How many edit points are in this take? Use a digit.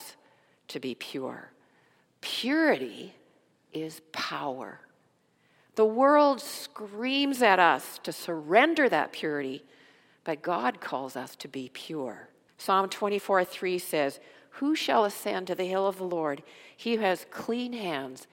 2